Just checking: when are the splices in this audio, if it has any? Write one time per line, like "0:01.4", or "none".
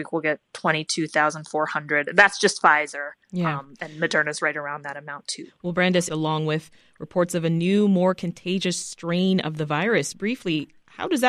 0:06.1